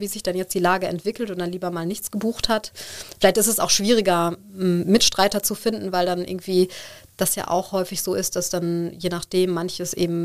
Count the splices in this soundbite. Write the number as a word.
zero